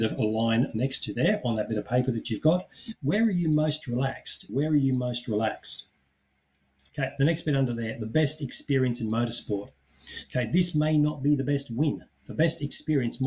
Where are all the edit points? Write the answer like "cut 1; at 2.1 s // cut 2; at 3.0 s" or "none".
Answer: cut 1; at 4.5 s